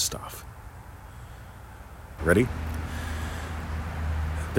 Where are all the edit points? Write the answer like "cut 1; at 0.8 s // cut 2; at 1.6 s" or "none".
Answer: cut 1; at 2.2 s